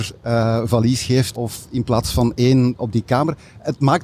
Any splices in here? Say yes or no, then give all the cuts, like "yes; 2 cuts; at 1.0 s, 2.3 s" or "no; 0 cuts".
yes; 2 cuts; at 1.3 s, 2.8 s